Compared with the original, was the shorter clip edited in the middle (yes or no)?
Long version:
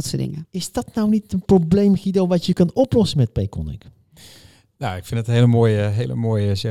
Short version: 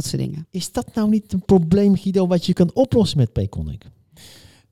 no